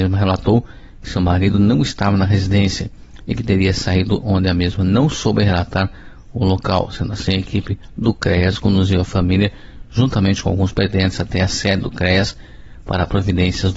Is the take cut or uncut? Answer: uncut